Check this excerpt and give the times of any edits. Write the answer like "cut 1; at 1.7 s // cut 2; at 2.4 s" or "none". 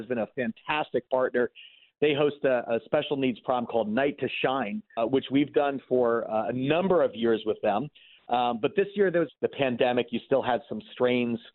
cut 1; at 5.0 s // cut 2; at 9.3 s

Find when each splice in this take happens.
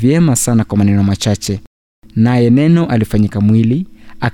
none

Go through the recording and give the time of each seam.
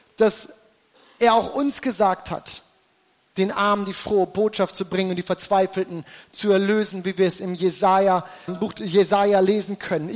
cut 1; at 8.5 s

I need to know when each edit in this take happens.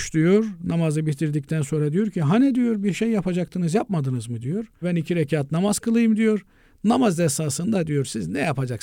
cut 1; at 4.8 s

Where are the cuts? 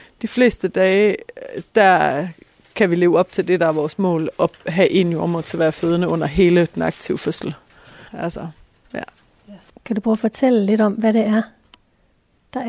cut 1; at 8.1 s // cut 2; at 9.7 s

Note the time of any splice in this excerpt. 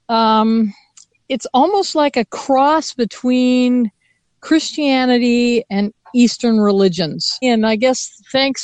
cut 1; at 7.4 s

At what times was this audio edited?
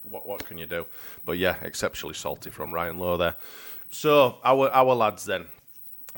cut 1; at 3.9 s

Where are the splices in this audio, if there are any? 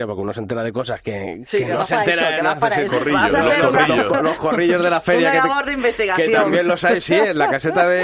cut 1; at 2.9 s

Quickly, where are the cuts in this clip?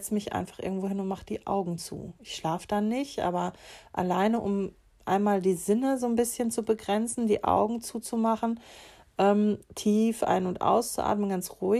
none

